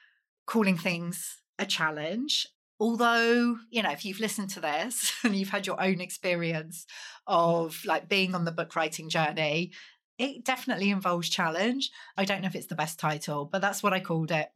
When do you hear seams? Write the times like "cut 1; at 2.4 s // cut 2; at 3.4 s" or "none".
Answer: cut 1; at 12.2 s